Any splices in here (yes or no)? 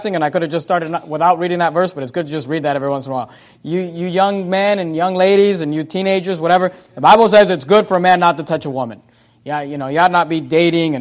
no